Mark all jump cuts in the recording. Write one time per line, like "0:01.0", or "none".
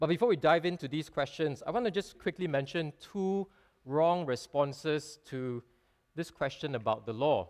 0:02.1